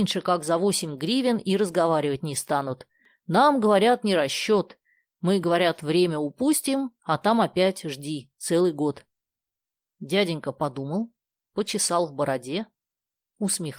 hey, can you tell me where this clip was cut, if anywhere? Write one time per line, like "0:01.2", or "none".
none